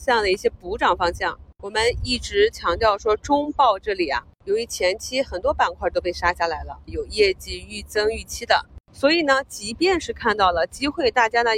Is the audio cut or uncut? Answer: cut